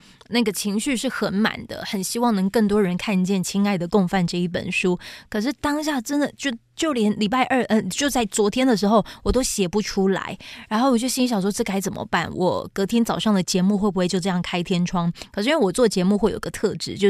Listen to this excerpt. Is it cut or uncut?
uncut